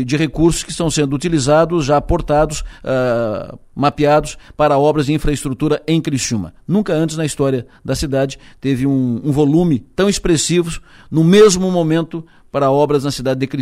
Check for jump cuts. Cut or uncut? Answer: uncut